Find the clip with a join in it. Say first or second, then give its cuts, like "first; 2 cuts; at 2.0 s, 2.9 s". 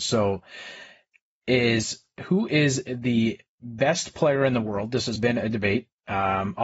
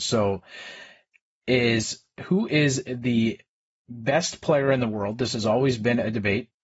first; 2 cuts; at 3.5 s, 5.2 s